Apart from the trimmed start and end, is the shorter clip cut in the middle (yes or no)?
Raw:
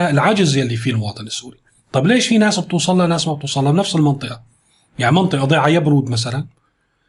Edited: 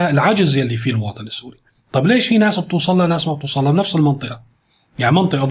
no